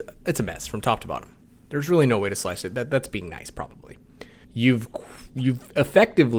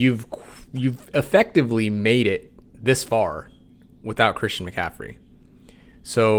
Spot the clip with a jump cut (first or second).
first